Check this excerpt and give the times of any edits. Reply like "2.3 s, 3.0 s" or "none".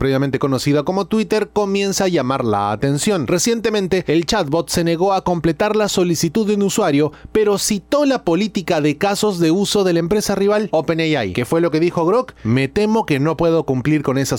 none